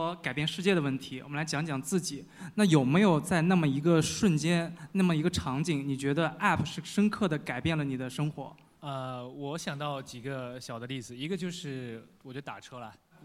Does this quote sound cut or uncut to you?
uncut